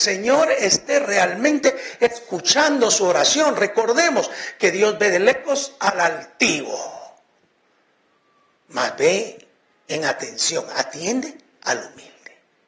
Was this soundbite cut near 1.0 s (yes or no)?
no